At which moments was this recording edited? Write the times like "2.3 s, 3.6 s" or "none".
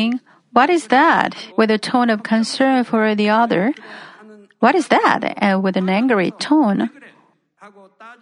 1.5 s